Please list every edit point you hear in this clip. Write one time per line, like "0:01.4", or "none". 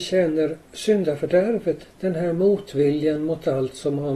0:01.8